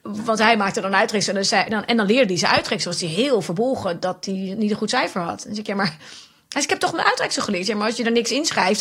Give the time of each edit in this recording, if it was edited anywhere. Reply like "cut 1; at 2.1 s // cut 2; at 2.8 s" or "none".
none